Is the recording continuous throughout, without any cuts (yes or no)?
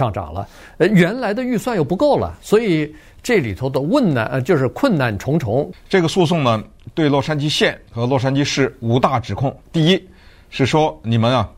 no